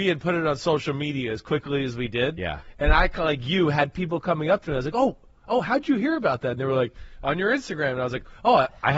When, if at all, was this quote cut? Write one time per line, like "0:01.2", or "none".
none